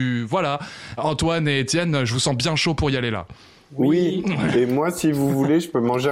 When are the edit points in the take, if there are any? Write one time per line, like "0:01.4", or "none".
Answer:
0:01.0